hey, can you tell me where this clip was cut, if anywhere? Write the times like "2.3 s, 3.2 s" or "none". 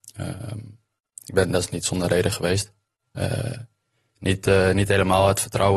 1.1 s